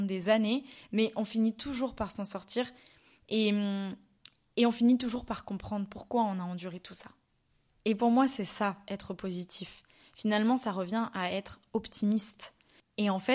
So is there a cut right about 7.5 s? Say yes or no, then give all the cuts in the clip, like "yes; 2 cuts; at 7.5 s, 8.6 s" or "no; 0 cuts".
no; 0 cuts